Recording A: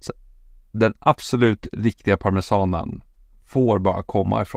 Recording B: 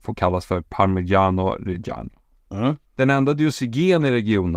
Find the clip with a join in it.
B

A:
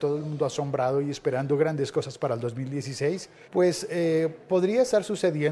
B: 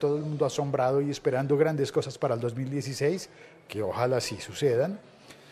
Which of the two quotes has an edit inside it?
A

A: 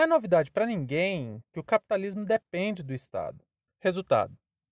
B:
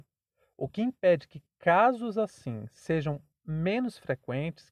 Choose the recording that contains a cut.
A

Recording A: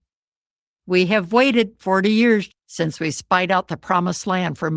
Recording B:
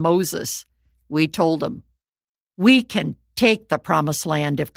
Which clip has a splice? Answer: A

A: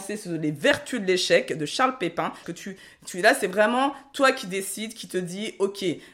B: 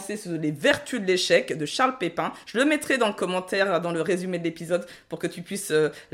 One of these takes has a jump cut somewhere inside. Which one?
A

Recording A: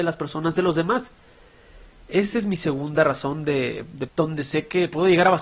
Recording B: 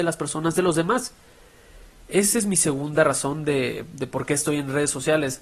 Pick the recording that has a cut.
A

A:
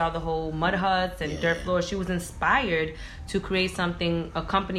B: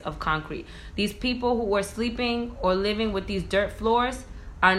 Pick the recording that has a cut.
B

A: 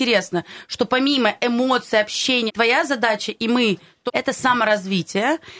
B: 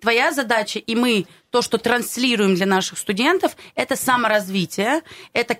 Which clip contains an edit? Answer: A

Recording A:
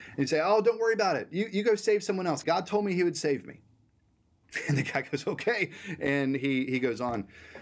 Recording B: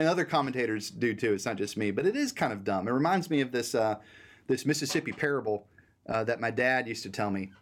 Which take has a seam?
A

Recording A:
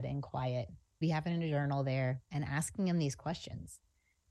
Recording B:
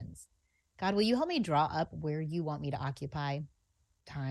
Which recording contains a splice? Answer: A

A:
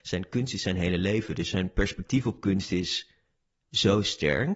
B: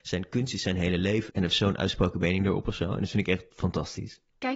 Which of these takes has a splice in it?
B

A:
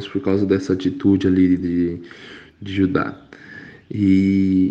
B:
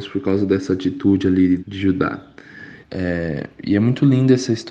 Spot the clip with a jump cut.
B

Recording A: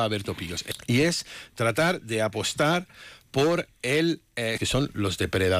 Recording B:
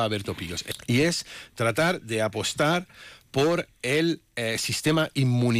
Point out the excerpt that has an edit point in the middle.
A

